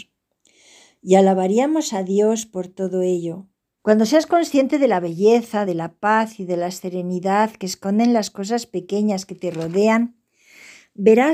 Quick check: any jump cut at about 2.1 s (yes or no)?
no